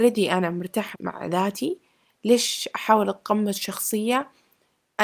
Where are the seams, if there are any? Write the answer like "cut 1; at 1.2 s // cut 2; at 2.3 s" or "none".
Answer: cut 1; at 0.9 s